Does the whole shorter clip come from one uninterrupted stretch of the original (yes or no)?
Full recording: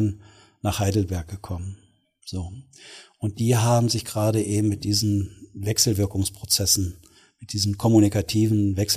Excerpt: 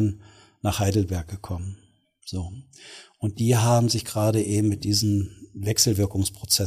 yes